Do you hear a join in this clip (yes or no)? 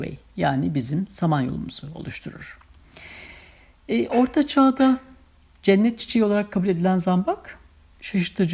no